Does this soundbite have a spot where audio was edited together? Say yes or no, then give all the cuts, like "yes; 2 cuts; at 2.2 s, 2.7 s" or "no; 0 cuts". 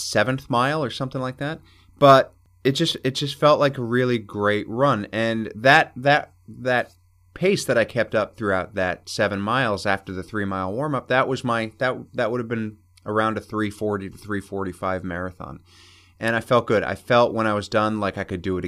no; 0 cuts